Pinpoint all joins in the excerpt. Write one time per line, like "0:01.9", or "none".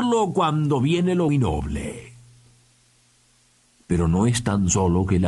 0:01.3